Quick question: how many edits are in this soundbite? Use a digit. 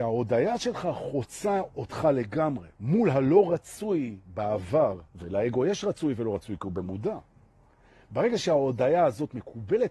2